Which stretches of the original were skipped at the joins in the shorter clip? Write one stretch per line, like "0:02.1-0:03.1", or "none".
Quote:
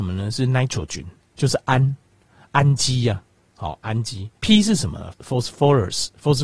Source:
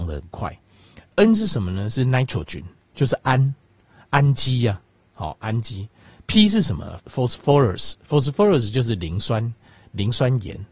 0:05.9-0:06.2